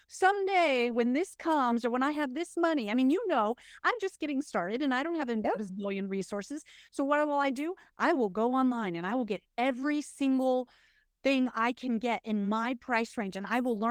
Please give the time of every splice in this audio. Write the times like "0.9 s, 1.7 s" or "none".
none